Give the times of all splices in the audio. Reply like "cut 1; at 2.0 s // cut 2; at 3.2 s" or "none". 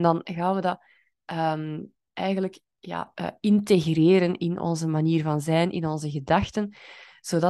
none